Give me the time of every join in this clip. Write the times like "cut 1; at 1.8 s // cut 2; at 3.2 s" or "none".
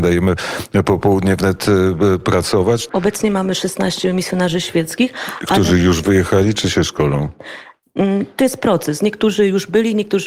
cut 1; at 2.9 s